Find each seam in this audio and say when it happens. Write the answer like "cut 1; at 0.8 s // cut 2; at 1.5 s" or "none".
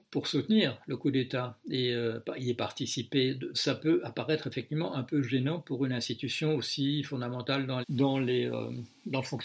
cut 1; at 3.5 s // cut 2; at 7.8 s